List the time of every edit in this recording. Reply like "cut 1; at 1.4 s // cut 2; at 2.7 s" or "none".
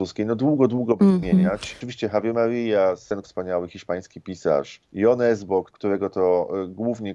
cut 1; at 3.2 s